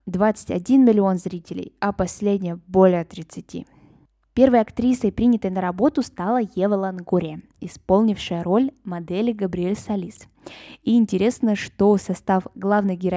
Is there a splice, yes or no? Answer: no